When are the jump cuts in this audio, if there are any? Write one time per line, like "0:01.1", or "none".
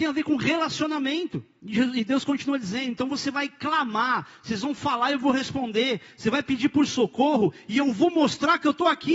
none